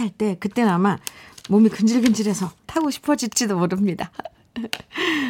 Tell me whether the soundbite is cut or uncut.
cut